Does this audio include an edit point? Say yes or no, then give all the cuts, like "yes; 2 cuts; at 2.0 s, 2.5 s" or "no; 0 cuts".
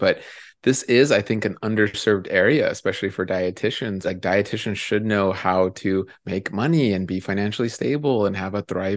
yes; 1 cut; at 4.0 s